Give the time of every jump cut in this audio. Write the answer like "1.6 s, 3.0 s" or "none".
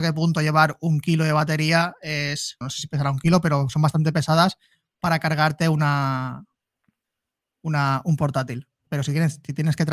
2.6 s, 8.9 s